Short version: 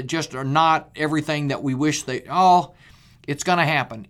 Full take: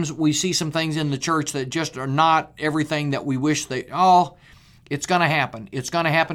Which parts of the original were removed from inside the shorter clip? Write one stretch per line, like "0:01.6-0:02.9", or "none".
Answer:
none